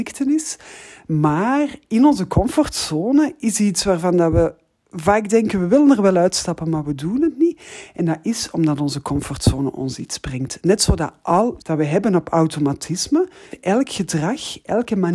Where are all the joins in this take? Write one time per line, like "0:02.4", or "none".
0:11.6
0:13.5